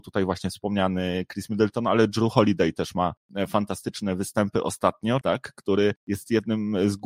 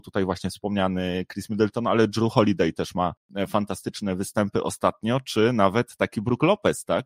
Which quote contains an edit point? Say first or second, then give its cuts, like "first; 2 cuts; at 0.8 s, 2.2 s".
first; 1 cut; at 5.2 s